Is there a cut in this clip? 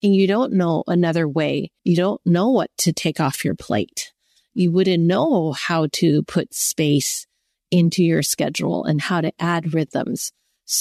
yes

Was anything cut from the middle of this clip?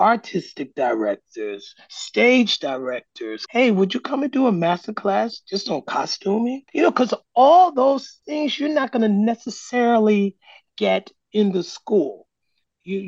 yes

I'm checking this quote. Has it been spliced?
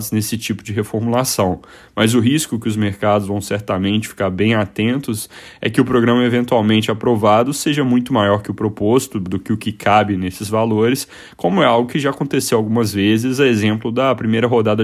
no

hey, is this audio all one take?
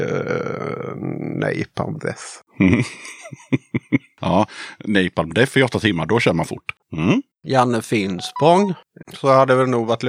no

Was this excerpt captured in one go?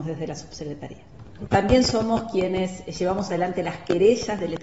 no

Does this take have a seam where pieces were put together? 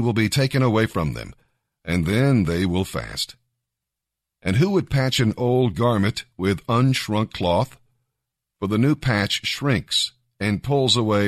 no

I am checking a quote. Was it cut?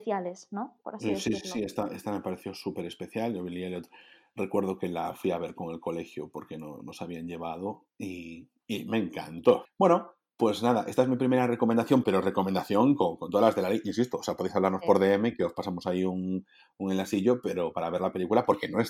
yes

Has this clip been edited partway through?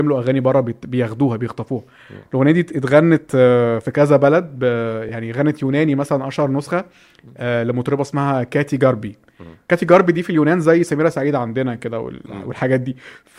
no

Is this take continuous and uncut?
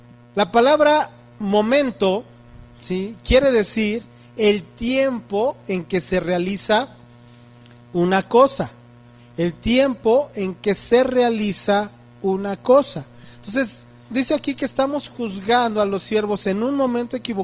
no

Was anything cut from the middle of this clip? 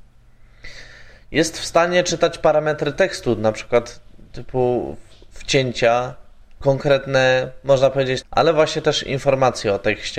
yes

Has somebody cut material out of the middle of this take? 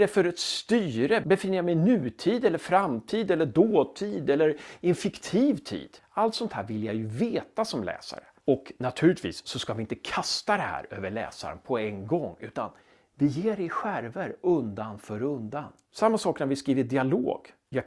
no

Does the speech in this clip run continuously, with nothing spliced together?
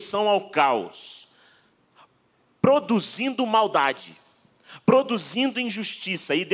yes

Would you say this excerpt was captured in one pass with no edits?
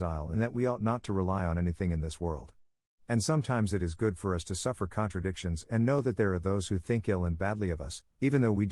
yes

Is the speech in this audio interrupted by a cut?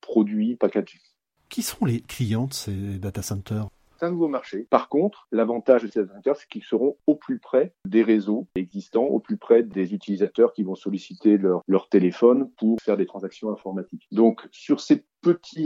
yes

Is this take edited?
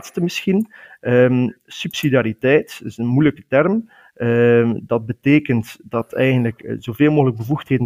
no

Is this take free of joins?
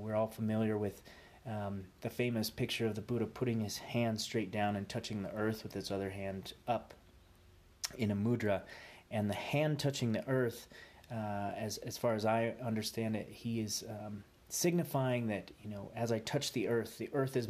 yes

